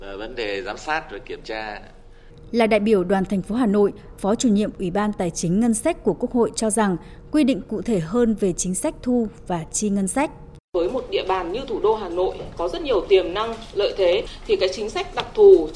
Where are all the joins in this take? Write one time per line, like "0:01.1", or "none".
0:04.1